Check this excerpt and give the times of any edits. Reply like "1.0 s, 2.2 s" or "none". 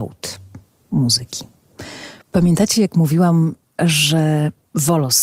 2.2 s